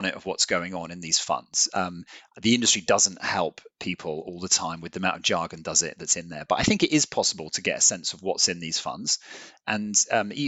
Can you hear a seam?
no; 0 cuts

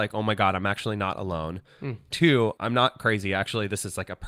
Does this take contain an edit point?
yes; 1 cut; at 2.6 s

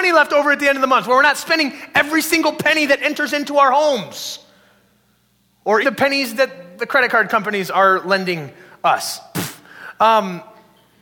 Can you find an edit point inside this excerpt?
yes; 1 cut; at 5.8 s

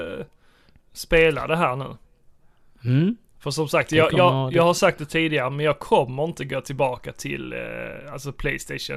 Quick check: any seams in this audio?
no; 0 cuts

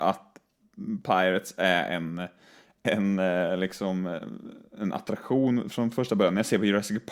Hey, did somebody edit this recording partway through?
no; 0 cuts

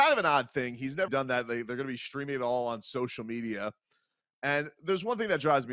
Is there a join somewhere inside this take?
yes; 1 cut; at 1.1 s

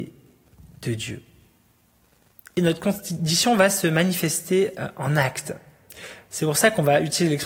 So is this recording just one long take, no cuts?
yes; 0 cuts

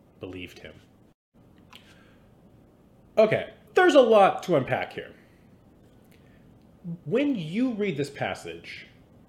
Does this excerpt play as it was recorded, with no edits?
no; 2 cuts; at 3.7 s, 7.0 s

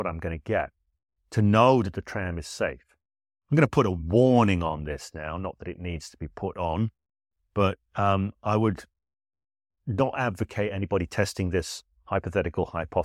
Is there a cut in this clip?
no; 0 cuts

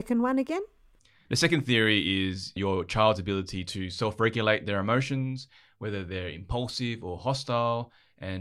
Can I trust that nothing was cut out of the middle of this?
no; 1 cut; at 2.6 s

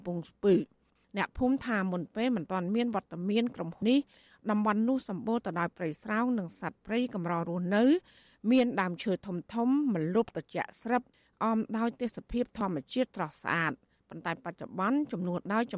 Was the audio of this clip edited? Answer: yes; 1 cut; at 3.8 s

